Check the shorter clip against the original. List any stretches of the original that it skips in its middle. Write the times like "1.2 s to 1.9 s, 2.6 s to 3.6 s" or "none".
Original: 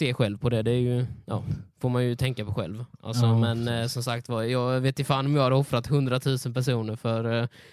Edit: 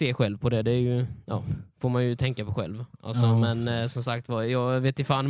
none